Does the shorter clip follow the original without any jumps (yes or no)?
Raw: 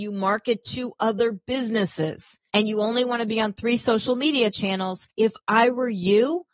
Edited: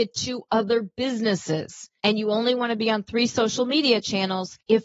yes